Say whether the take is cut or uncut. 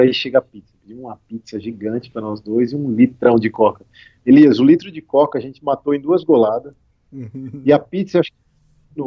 uncut